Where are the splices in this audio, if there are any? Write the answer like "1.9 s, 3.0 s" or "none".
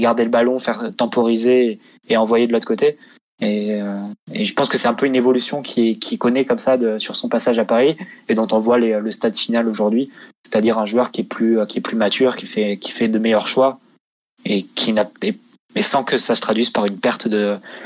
3.3 s